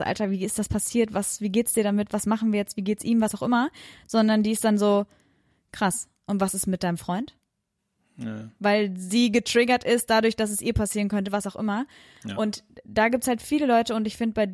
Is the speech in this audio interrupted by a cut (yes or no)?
no